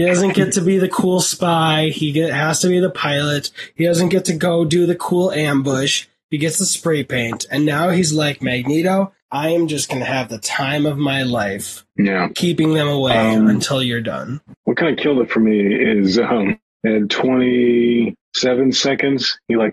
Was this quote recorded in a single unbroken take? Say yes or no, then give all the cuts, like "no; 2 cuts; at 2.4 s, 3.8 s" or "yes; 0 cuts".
yes; 0 cuts